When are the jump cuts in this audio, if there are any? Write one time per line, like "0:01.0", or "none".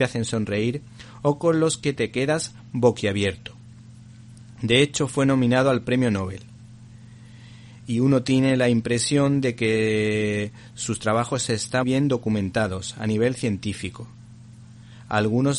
0:11.8